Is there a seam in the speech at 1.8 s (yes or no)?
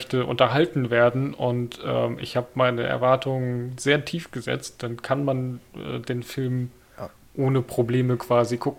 no